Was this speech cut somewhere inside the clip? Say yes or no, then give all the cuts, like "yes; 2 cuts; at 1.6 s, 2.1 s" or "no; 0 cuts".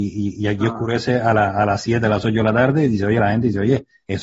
no; 0 cuts